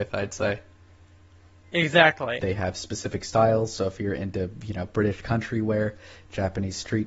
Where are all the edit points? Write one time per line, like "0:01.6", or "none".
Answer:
0:02.4